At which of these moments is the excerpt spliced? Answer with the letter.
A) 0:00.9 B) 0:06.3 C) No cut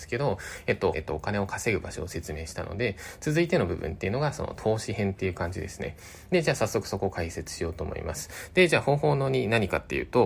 A